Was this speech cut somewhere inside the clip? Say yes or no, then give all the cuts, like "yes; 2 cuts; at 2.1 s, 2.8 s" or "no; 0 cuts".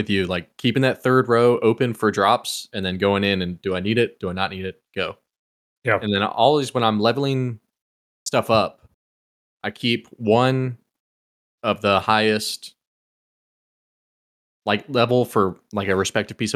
no; 0 cuts